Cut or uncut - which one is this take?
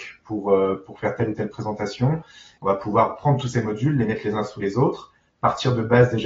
cut